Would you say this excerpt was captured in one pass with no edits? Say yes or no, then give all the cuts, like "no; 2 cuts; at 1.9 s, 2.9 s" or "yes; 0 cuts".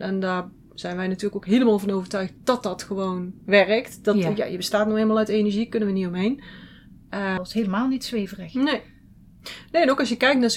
no; 2 cuts; at 3.4 s, 7.4 s